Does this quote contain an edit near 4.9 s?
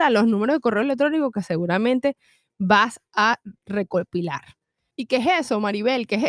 yes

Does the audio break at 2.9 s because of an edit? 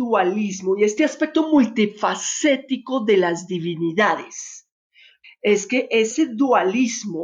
no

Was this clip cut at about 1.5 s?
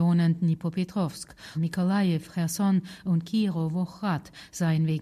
yes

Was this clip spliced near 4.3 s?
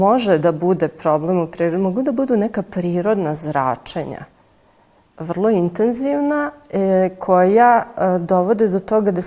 no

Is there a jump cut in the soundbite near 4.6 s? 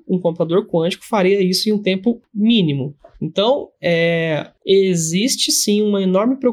yes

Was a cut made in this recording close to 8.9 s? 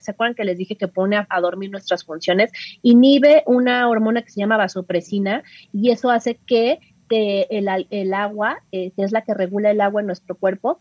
no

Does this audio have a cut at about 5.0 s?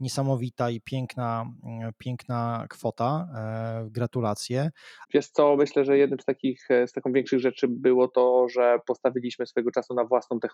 yes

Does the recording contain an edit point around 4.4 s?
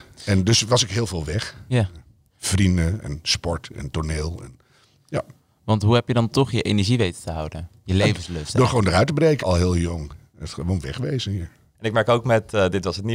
no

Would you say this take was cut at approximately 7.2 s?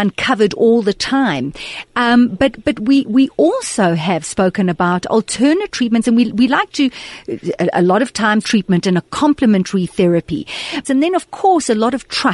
no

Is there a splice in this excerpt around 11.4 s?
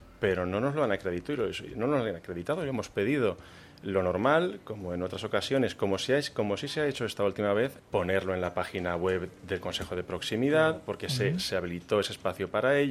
no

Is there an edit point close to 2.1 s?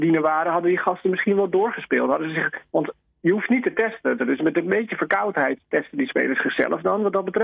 no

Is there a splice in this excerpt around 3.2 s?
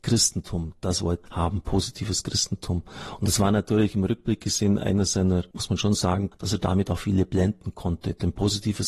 no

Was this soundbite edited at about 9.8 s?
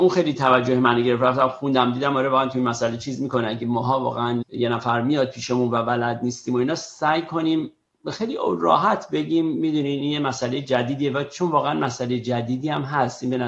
no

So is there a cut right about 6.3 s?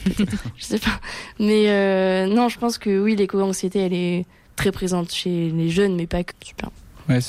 yes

